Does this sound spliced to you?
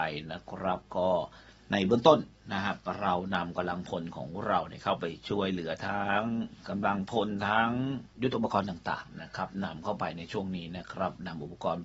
yes; 1 cut; at 8.1 s

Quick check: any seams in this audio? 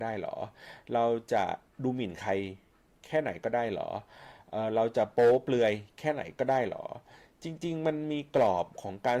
no; 0 cuts

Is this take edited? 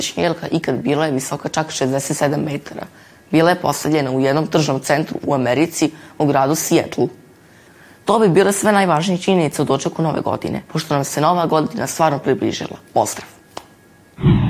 yes; 1 cut; at 10.6 s

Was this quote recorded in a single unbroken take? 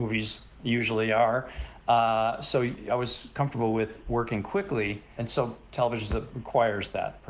yes; 0 cuts

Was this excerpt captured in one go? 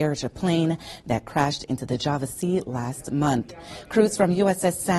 yes; 0 cuts

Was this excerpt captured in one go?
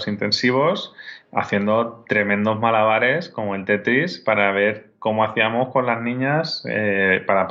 yes; 0 cuts

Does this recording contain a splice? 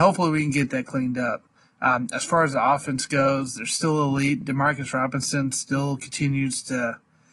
no; 0 cuts

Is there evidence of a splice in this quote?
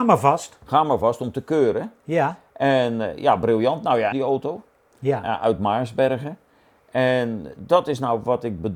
yes; 1 cut; at 4.1 s

